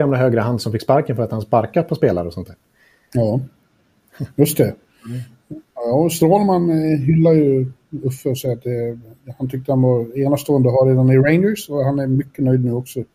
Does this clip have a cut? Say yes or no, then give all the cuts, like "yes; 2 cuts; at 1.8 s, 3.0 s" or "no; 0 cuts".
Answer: no; 0 cuts